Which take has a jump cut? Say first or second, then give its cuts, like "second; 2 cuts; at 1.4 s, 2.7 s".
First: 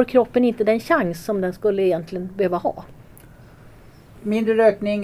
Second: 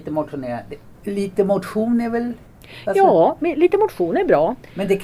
second; 1 cut; at 0.9 s